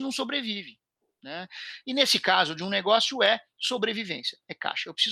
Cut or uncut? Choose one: cut